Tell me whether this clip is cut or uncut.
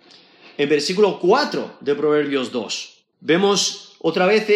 cut